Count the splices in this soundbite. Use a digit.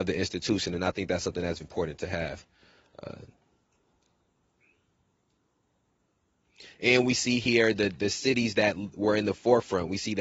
1